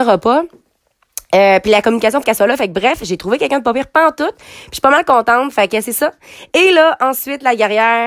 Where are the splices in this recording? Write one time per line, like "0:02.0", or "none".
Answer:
0:02.2